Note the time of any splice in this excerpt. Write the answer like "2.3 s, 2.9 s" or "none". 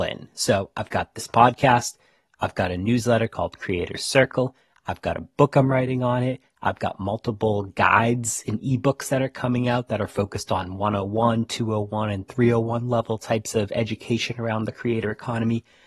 none